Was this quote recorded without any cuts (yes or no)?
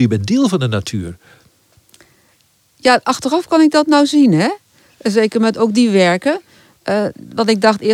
yes